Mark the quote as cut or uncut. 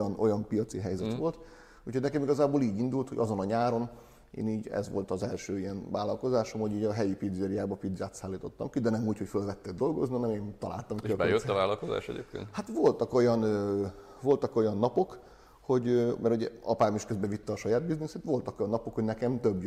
uncut